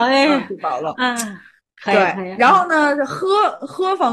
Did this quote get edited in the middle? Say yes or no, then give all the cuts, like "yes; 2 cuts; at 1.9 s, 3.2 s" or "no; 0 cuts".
no; 0 cuts